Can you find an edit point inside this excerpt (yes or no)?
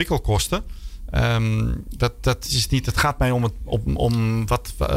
no